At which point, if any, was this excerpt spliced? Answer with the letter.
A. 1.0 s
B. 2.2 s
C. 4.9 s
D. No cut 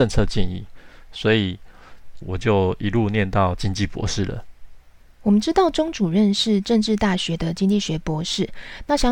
B